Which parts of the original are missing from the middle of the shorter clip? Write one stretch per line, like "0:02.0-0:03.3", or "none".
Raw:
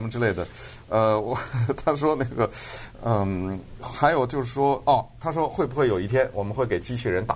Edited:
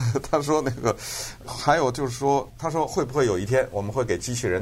0:03.0-0:03.8
0:04.8-0:05.1